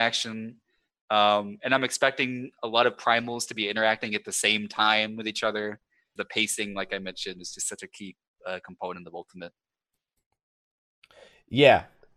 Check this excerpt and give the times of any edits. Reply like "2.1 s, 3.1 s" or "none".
6.2 s